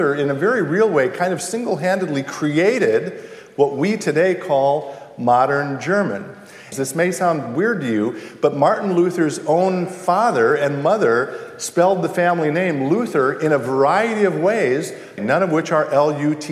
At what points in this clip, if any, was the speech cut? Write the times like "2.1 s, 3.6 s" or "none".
6.7 s, 15.2 s